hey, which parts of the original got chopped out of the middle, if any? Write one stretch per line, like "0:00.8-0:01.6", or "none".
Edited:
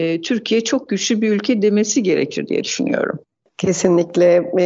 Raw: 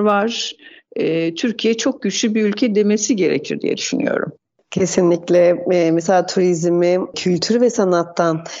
none